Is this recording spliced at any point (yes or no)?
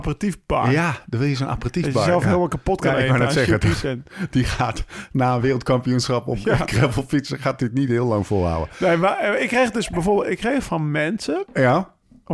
no